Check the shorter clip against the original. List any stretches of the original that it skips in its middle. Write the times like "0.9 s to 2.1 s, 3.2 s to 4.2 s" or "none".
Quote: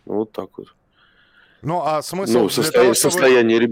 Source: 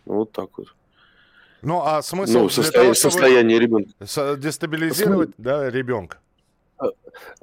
none